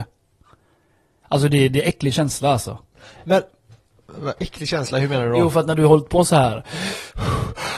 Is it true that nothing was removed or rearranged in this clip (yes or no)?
yes